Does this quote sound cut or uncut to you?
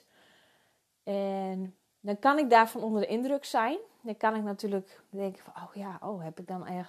uncut